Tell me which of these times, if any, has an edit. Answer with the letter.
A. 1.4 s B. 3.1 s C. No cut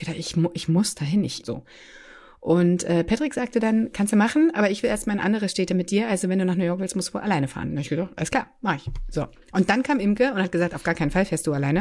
A